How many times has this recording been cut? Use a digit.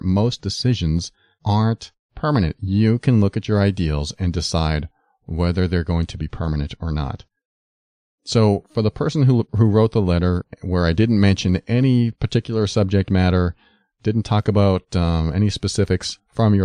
0